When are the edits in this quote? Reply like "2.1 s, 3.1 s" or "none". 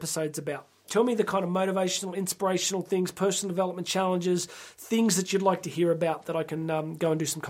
none